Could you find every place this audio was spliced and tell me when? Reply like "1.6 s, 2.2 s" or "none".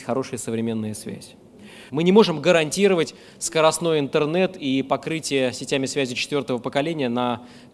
1.9 s